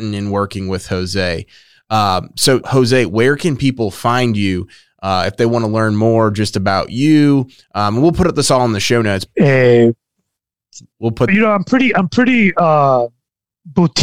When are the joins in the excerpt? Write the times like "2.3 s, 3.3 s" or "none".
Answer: 2.6 s, 9.3 s, 11.3 s